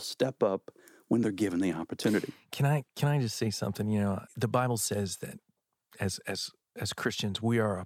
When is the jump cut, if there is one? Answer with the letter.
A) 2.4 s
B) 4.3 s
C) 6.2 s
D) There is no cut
B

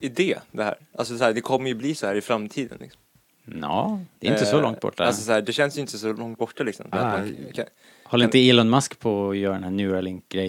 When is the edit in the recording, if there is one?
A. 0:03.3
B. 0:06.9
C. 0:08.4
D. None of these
B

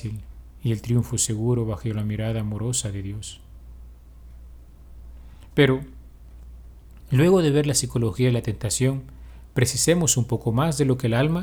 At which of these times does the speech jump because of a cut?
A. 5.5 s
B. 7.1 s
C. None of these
C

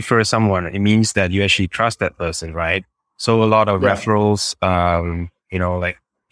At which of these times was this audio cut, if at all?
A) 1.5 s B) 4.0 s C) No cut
C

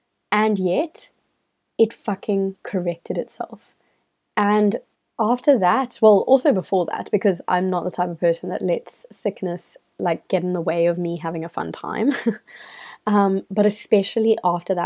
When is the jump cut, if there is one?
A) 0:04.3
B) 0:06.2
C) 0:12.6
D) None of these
A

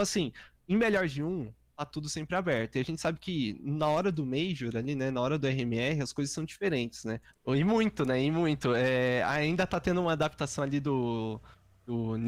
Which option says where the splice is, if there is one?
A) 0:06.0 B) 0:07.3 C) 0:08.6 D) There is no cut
B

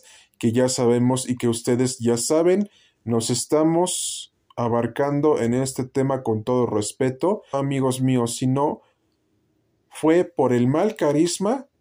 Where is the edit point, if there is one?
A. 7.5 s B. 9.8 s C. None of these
A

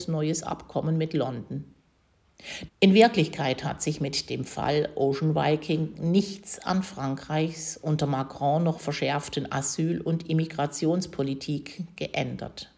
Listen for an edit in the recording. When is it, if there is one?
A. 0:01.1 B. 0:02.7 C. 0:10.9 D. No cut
B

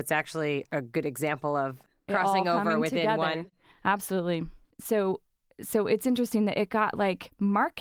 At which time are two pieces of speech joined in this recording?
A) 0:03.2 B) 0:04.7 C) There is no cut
B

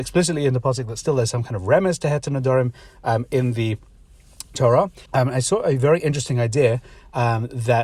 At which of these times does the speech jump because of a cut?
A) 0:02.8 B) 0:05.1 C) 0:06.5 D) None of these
B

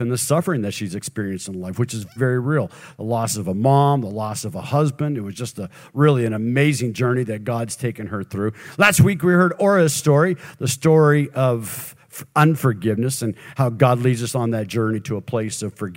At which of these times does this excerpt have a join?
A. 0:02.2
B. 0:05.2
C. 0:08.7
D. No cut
A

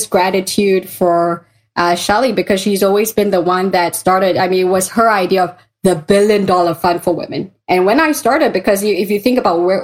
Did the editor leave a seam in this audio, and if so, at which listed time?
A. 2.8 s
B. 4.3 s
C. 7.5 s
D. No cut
D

